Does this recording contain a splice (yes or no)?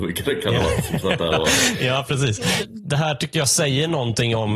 no